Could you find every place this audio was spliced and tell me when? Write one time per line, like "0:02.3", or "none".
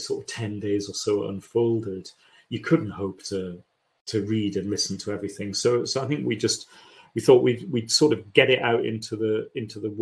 none